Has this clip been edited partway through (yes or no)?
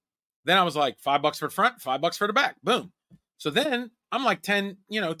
no